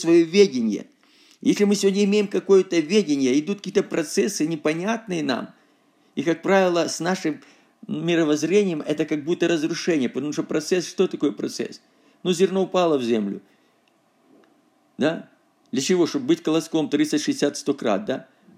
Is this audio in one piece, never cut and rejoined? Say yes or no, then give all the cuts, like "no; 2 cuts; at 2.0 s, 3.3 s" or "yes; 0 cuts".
yes; 0 cuts